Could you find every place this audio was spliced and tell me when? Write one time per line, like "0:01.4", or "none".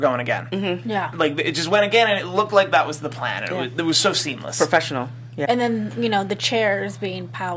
0:01.1
0:05.5